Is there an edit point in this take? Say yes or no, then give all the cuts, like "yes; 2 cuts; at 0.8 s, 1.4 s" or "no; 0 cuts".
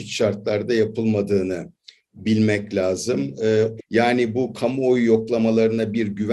yes; 1 cut; at 3.8 s